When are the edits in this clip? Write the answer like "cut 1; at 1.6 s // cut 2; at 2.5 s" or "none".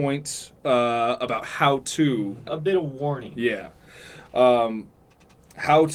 cut 1; at 2.5 s